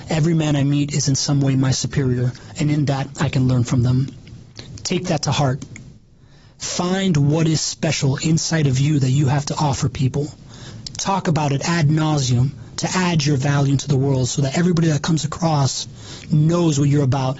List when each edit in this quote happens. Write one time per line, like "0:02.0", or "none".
none

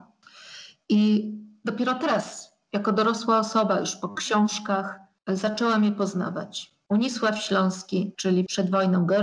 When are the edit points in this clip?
0:06.8
0:08.1

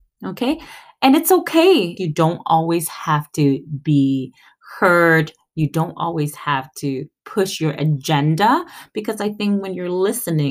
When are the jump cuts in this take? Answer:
0:02.0

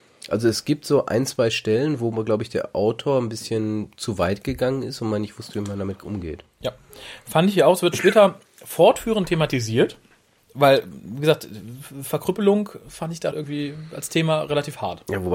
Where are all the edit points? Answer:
0:10.4
0:13.3

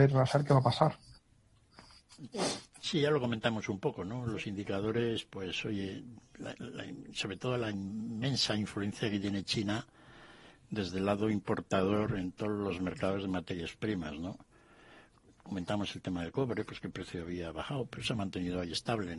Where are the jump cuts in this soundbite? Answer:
none

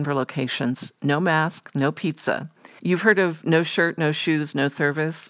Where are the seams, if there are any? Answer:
0:02.8

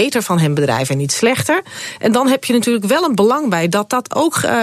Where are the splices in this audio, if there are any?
none

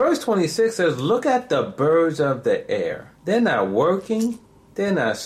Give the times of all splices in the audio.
0:03.2

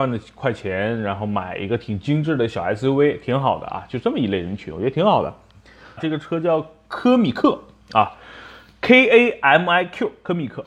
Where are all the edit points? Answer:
0:06.0

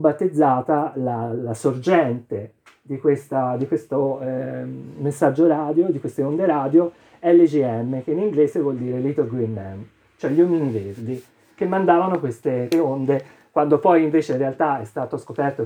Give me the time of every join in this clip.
0:12.7

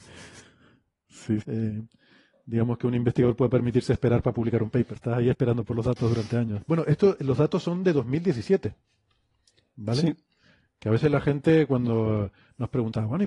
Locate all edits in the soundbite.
0:01.4
0:05.0
0:06.6

